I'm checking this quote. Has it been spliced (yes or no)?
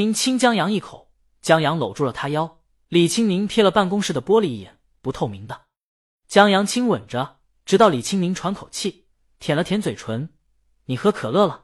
no